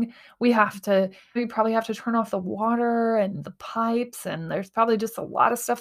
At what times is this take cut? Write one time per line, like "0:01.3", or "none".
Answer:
0:01.4